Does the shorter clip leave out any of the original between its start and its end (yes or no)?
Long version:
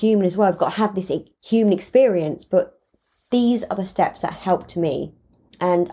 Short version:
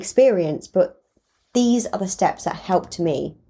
no